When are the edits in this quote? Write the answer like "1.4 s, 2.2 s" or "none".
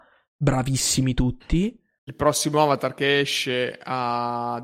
2.0 s

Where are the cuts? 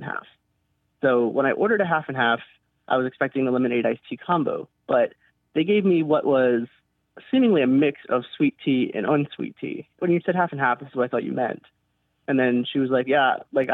10.0 s

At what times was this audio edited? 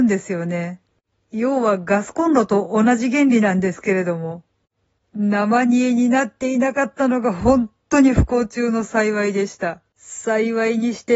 5.0 s, 9.9 s

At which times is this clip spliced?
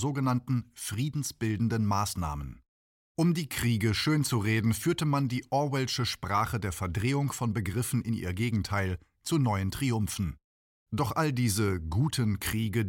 none

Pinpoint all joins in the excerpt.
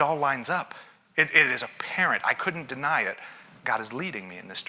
none

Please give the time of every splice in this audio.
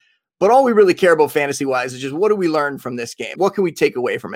3.4 s

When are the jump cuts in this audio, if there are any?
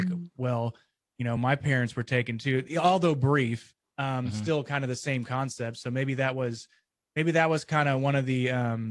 none

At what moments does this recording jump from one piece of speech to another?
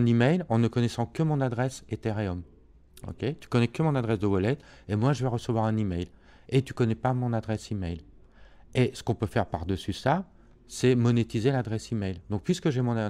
none

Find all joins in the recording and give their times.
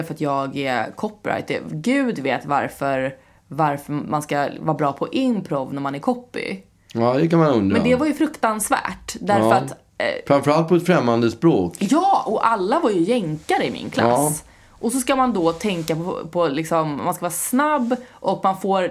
none

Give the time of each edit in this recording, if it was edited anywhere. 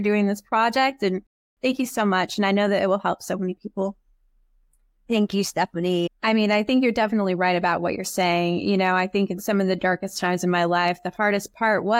6.1 s

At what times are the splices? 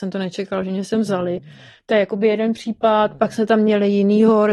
none

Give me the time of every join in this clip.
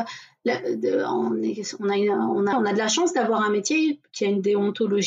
2.5 s

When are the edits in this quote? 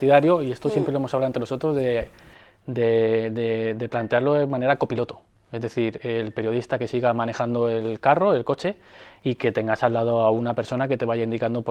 none

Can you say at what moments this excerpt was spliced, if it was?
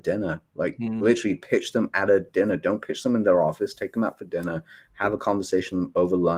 none

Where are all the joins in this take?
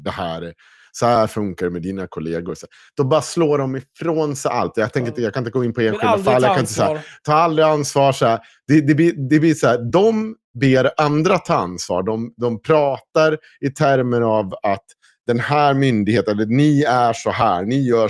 none

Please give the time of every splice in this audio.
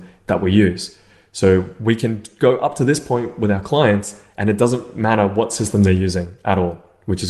none

